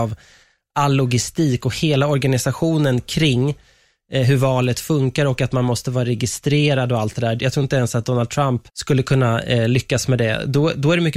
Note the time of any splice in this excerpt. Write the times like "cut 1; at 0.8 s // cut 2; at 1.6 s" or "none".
cut 1; at 7.4 s // cut 2; at 8.7 s